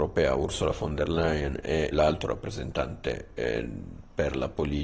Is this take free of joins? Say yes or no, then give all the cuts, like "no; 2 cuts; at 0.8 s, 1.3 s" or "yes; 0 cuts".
no; 1 cut; at 1.9 s